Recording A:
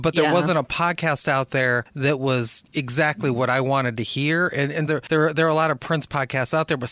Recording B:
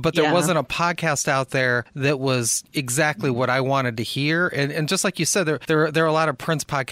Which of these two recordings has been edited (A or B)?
A